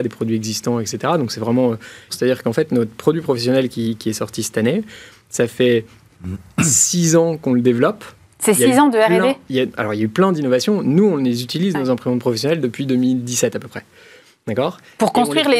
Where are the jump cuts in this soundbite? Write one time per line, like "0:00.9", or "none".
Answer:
0:02.1